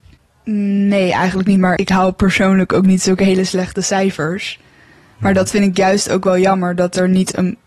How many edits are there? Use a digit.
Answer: 1